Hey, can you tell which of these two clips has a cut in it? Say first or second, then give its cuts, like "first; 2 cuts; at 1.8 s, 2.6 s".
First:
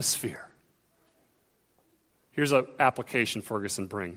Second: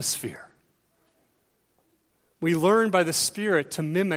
first; 1 cut; at 2.2 s